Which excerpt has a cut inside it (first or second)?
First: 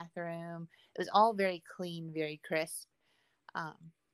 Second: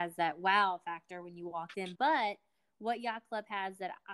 second